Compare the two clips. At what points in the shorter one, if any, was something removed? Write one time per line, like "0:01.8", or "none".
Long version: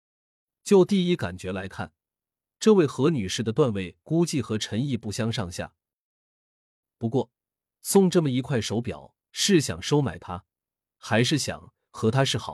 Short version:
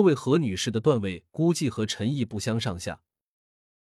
none